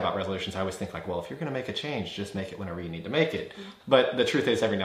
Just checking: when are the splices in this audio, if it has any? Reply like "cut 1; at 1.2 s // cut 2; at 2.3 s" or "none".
cut 1; at 3.8 s